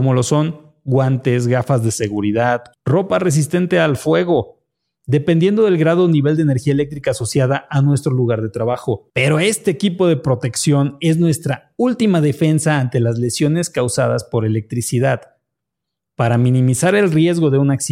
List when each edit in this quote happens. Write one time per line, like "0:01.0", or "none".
0:02.7